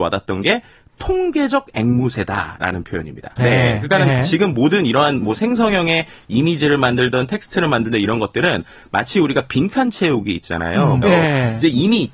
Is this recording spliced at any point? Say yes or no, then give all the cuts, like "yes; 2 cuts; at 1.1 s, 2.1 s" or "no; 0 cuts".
yes; 2 cuts; at 3.4 s, 11.0 s